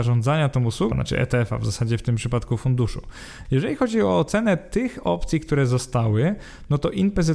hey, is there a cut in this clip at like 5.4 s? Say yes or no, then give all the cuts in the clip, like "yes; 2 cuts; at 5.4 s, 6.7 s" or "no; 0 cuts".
no; 2 cuts; at 0.9 s, 3.4 s